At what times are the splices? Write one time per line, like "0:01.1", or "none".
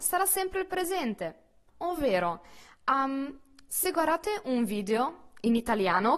0:01.7
0:03.7